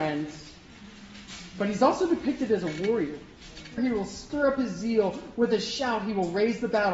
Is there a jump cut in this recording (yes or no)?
yes